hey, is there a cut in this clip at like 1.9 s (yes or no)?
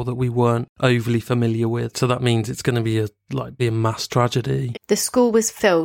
yes